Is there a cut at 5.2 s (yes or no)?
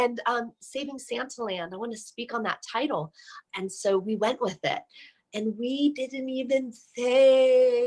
no